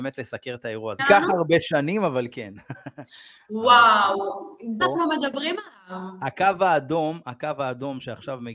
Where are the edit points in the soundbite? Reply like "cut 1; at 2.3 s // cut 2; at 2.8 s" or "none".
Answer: cut 1; at 1.0 s // cut 2; at 4.8 s

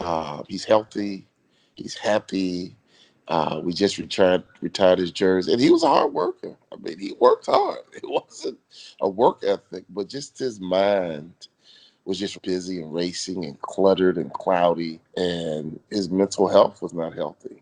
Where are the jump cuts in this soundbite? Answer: cut 1; at 12.3 s // cut 2; at 15.1 s

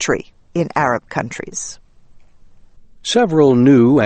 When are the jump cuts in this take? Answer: none

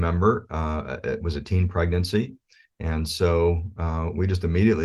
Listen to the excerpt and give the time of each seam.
none

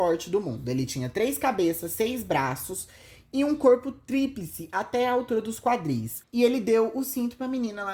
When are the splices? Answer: cut 1; at 6.2 s

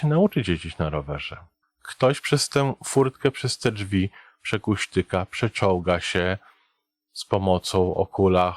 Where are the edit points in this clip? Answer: cut 1; at 1.6 s

